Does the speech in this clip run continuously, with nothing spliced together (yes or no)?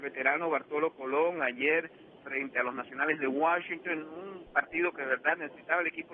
yes